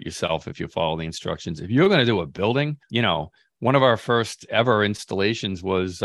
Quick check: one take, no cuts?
yes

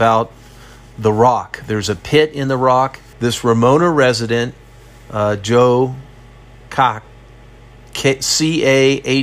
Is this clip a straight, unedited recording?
no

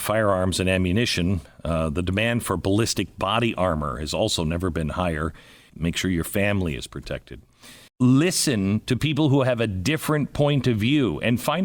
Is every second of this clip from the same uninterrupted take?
no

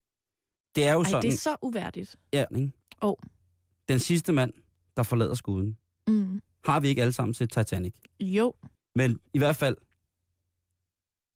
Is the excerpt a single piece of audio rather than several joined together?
no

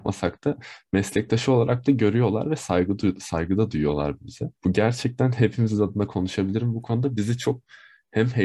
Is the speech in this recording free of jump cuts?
no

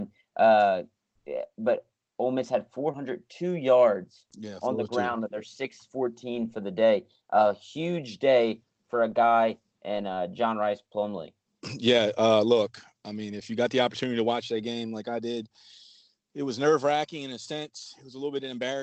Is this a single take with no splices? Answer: yes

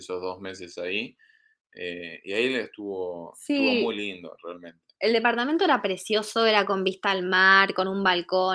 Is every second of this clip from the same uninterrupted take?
yes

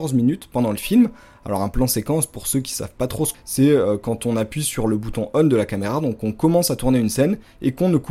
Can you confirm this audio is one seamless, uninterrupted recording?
no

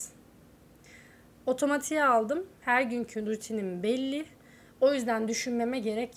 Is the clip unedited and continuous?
no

